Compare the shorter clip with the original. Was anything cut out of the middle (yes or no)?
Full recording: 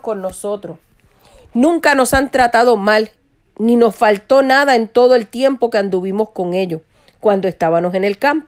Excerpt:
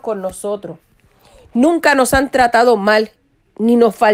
no